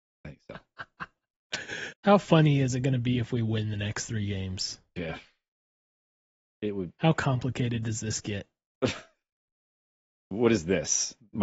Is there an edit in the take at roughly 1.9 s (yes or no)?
yes